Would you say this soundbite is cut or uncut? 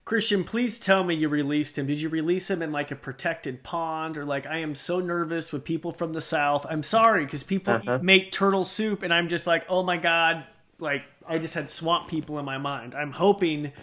uncut